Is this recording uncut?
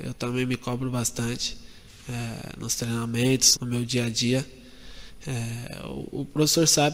no; 1 cut; at 3.6 s

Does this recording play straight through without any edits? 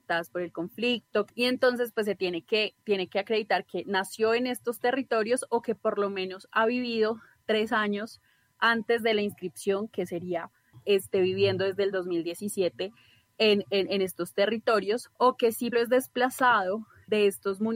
no; 1 cut; at 15.7 s

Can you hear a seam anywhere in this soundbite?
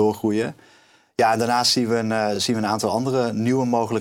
no; 0 cuts

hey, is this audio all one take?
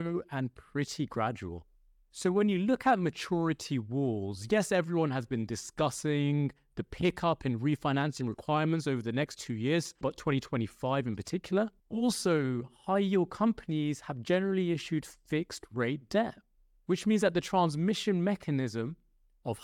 no; 3 cuts; at 1.9 s, 10.0 s, 11.8 s

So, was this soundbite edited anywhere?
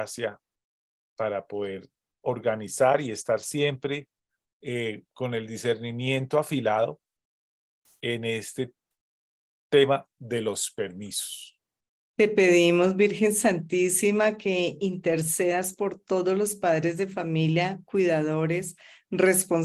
no; 0 cuts

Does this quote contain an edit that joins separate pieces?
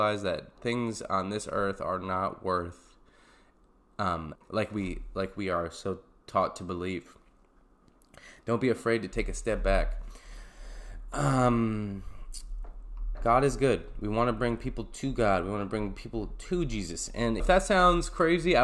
yes; 3 cuts; at 4.4 s, 13.1 s, 17.4 s

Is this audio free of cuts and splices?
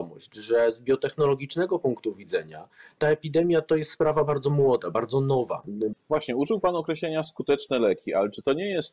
no; 1 cut; at 5.9 s

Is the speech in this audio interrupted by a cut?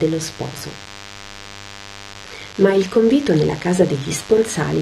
no; 0 cuts

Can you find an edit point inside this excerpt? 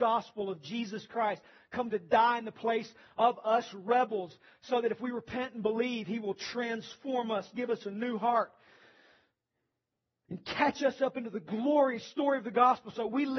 no; 0 cuts

